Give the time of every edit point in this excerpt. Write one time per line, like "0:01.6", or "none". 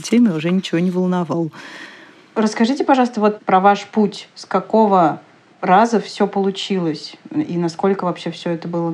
none